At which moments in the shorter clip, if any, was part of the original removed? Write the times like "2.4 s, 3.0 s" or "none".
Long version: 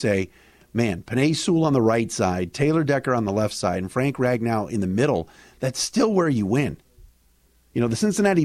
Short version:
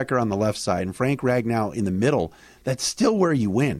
none